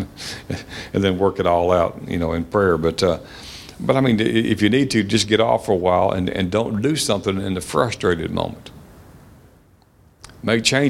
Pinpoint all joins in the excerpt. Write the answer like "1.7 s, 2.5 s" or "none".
none